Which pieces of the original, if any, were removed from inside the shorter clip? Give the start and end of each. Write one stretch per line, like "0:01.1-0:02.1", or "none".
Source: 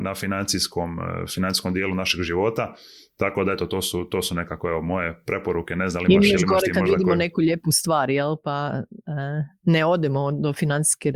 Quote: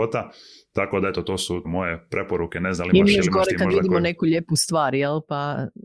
0:04.1-0:04.8